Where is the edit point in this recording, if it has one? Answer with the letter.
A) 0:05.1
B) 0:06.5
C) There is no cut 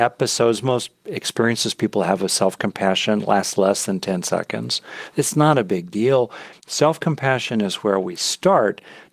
B